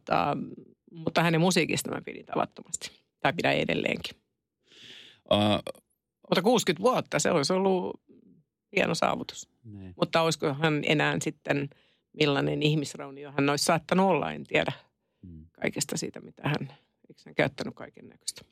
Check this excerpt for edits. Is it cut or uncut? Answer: uncut